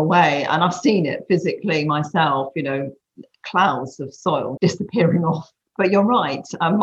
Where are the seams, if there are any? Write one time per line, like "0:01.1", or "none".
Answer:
0:04.6